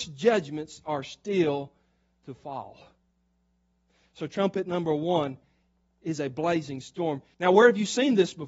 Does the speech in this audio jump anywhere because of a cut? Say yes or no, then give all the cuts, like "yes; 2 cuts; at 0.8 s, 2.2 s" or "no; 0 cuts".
yes; 1 cut; at 7.3 s